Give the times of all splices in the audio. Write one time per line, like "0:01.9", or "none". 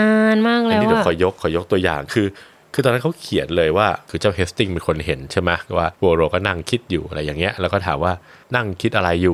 none